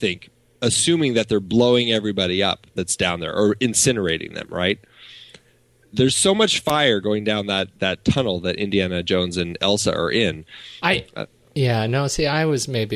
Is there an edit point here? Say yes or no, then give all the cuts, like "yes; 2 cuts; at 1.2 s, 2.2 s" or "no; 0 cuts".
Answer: yes; 2 cuts; at 7.8 s, 10.8 s